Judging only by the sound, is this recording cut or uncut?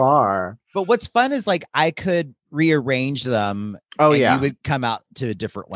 uncut